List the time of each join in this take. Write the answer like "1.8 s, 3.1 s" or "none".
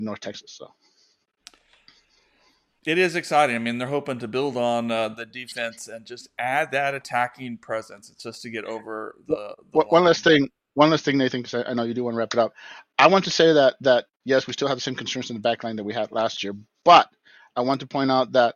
none